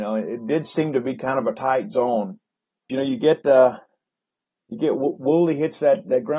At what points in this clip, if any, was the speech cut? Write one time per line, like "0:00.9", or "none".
0:02.9